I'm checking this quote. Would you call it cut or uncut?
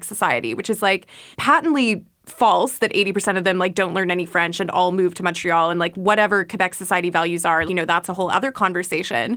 cut